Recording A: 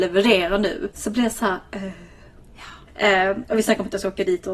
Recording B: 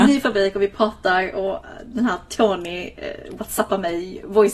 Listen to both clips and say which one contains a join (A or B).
A